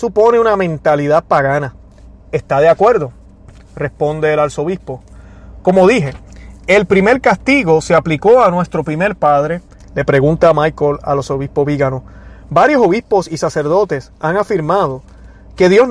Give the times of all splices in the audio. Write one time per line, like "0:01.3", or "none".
0:09.8